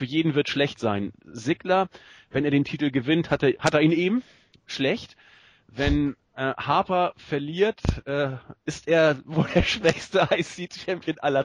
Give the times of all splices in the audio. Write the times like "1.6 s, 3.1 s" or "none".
none